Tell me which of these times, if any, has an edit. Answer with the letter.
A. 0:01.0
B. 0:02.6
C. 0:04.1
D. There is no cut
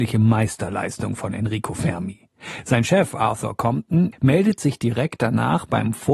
C